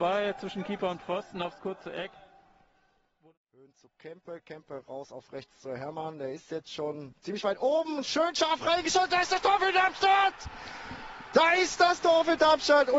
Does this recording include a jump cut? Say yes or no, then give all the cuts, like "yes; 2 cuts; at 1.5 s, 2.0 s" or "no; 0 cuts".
no; 0 cuts